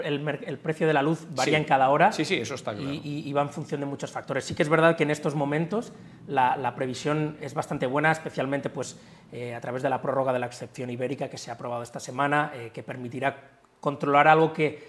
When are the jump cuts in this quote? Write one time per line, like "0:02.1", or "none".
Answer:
none